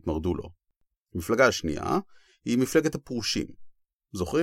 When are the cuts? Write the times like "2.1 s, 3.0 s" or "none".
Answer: 1.0 s